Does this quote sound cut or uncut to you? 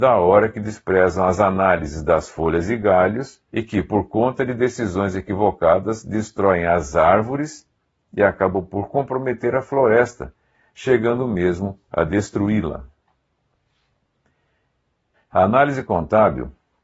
cut